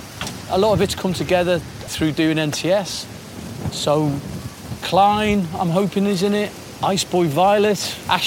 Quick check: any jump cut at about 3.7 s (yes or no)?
no